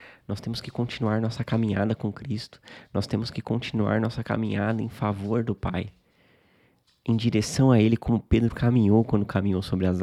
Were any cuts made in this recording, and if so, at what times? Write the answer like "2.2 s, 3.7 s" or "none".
none